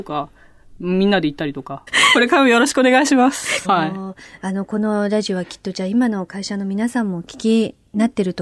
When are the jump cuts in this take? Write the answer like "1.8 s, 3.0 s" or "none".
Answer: 1.9 s, 3.6 s